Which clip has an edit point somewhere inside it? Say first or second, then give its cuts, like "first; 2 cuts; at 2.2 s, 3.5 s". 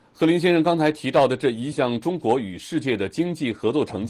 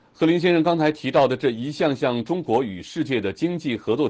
first; 1 cut; at 1.7 s